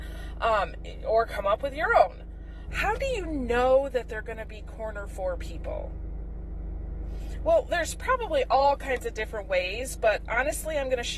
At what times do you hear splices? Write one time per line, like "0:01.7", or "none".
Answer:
0:02.7